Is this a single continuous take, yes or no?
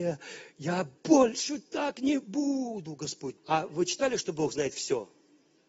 no